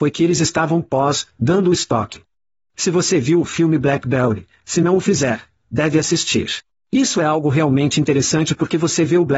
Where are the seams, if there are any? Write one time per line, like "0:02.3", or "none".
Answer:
0:02.7